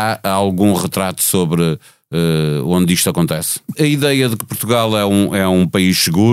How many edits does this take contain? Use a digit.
1